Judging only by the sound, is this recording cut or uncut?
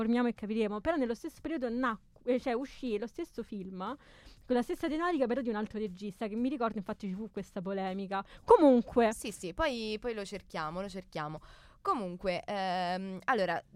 uncut